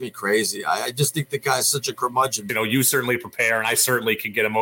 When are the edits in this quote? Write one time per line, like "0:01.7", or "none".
0:02.5